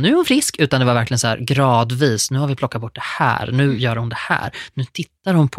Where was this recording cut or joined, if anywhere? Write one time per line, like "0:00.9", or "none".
none